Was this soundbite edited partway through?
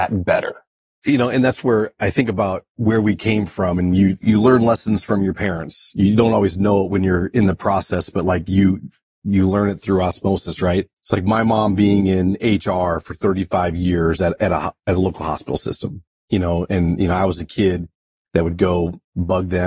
yes; 1 cut; at 11.0 s

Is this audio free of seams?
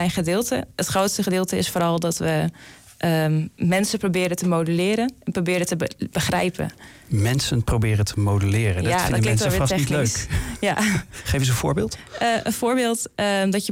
yes; 0 cuts

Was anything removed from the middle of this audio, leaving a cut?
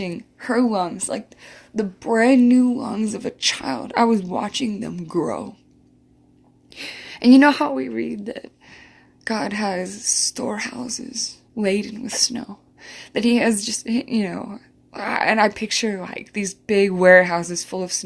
yes; 1 cut; at 11.5 s

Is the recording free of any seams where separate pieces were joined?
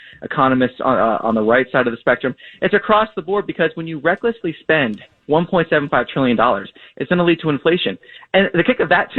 yes; 0 cuts

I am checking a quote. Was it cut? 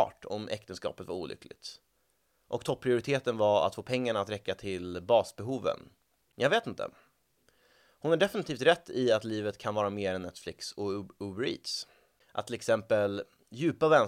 no; 0 cuts

